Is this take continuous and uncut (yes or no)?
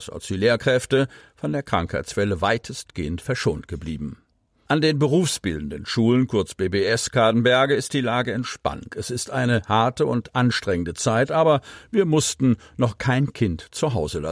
no